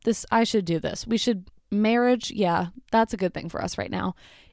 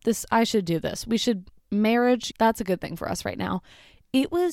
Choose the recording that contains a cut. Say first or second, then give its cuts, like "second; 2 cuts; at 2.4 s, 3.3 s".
second; 1 cut; at 2.3 s